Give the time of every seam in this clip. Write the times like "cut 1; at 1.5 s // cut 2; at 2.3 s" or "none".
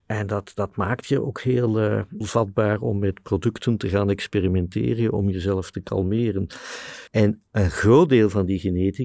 cut 1; at 2.2 s // cut 2; at 7.1 s